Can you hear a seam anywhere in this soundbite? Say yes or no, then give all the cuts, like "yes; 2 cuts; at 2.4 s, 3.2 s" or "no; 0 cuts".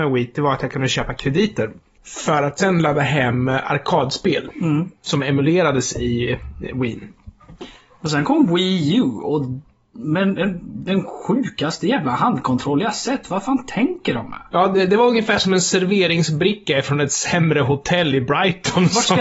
no; 0 cuts